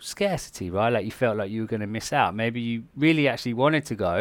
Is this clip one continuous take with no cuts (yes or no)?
yes